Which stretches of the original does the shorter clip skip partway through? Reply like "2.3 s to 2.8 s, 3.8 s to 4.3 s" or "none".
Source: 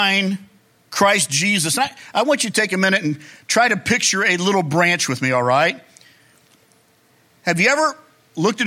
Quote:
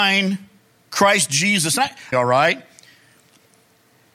2.1 s to 5.3 s